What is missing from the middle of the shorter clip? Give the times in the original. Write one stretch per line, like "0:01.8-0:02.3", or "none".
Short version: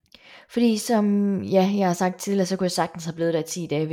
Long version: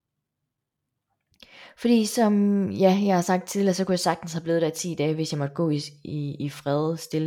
none